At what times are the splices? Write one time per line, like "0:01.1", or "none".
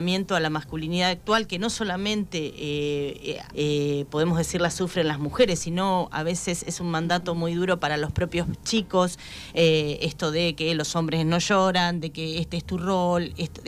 0:03.5